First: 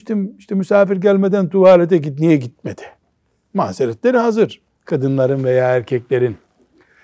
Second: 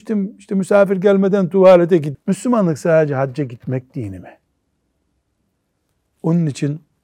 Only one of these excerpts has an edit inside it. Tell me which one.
second; 1 cut; at 2.1 s

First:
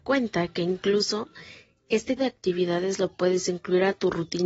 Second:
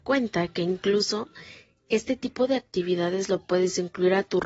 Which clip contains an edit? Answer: first; 1 cut; at 2.2 s

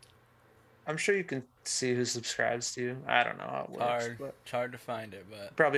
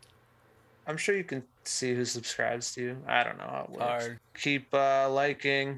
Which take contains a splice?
second; 1 cut; at 4.2 s

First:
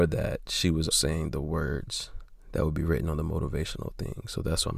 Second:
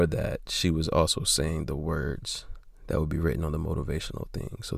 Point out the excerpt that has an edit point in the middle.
first; 1 cut; at 0.9 s

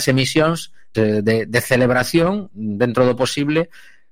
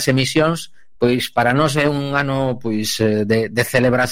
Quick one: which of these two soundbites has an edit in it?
first; 1 cut; at 0.9 s

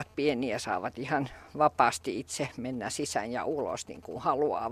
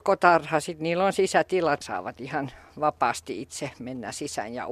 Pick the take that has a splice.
second; 1 cut; at 1.8 s

